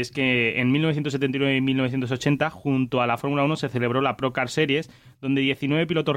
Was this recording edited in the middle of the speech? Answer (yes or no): no